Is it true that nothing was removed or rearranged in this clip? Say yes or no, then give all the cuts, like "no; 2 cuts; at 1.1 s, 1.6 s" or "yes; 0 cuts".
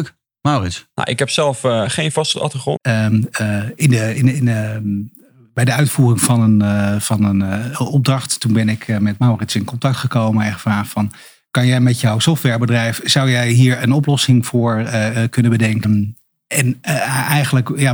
no; 2 cuts; at 2.8 s, 15.8 s